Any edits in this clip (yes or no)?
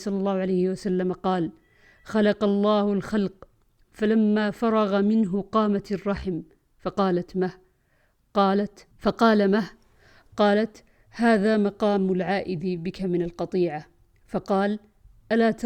yes